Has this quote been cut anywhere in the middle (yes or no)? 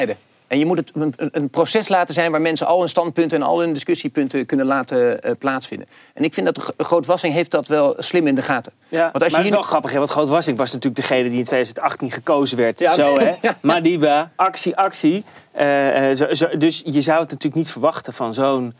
no